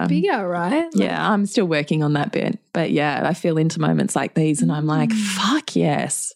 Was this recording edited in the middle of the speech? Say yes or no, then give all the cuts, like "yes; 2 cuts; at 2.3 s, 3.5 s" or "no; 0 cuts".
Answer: no; 0 cuts